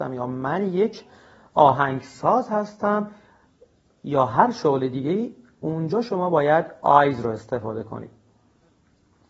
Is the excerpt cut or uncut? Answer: uncut